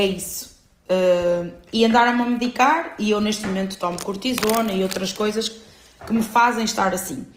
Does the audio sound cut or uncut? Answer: uncut